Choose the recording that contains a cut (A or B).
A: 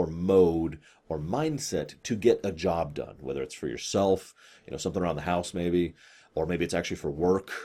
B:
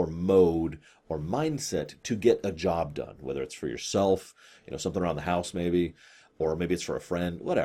B